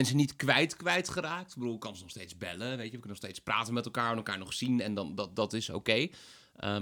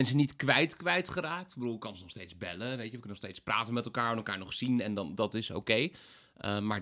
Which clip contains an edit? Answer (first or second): second